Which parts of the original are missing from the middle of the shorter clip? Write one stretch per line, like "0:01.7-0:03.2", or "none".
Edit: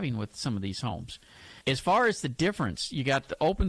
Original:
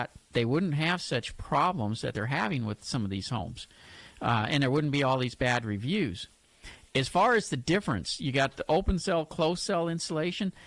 0:04.1-0:06.9